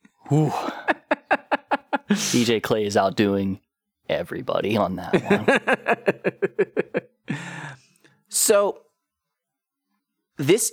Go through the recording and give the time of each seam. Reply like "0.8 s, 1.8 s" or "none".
none

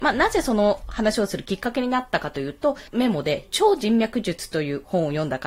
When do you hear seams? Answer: 2.9 s

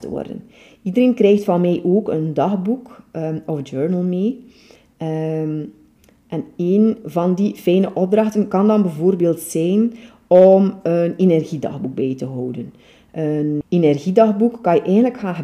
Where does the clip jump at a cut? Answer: 13.6 s

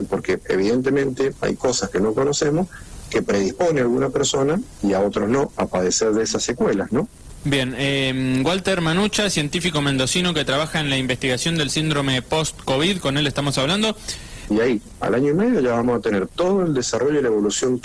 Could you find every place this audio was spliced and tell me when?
7.4 s, 14.5 s

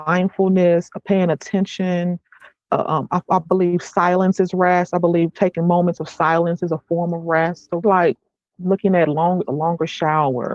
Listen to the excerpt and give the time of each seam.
7.8 s, 9.4 s

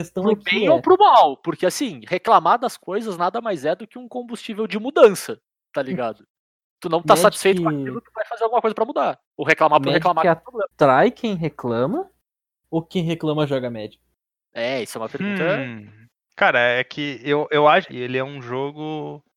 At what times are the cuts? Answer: 16.2 s, 17.9 s

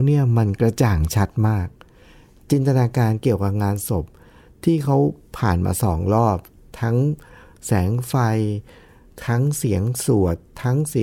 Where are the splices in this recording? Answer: none

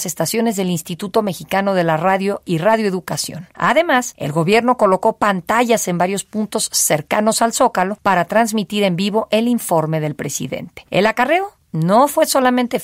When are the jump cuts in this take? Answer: none

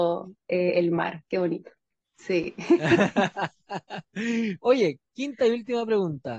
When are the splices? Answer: 2.0 s

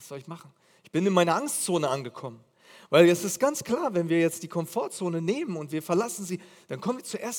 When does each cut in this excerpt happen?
none

